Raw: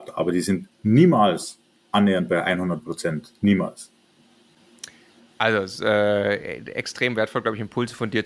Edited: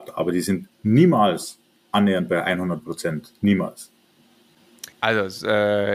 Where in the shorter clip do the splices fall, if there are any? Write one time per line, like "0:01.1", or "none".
0:04.9